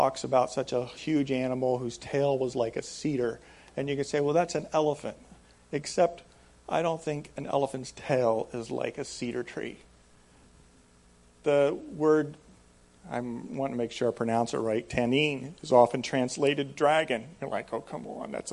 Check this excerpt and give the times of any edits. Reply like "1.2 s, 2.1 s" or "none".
none